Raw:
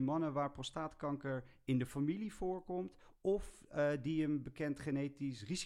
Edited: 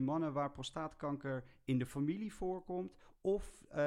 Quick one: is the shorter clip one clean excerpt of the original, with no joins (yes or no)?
yes